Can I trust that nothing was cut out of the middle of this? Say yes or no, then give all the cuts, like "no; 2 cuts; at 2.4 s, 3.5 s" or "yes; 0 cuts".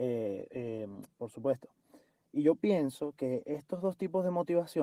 no; 1 cut; at 1.1 s